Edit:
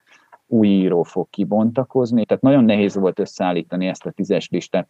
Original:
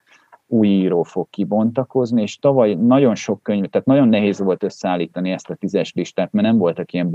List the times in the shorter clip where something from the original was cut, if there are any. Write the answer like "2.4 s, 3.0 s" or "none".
2.2 s